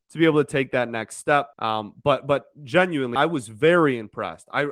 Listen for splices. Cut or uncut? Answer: cut